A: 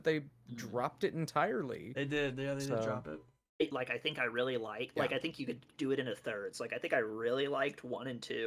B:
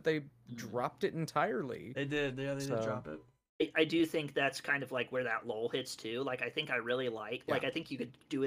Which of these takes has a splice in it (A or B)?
A